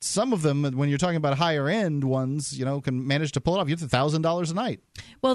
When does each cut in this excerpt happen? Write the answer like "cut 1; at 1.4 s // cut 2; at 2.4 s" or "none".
none

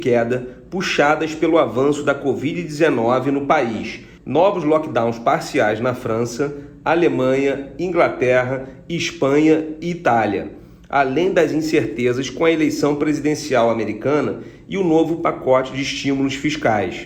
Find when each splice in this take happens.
cut 1; at 4.2 s

